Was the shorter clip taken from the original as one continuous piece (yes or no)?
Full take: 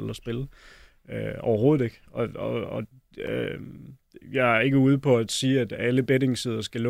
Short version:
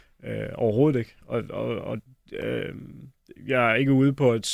yes